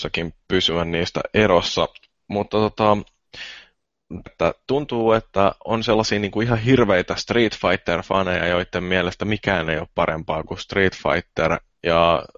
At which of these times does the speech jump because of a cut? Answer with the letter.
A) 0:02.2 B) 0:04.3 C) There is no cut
B